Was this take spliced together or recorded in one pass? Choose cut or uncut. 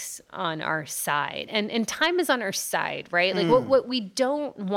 uncut